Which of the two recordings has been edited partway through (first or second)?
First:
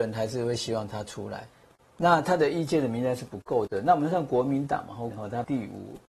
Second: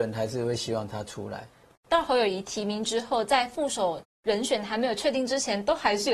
first